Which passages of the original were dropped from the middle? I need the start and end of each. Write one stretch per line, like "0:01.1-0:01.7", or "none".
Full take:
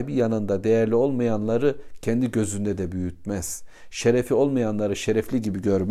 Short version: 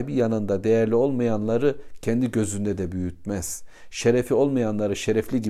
none